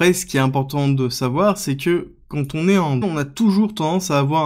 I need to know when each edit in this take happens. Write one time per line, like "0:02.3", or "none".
0:03.0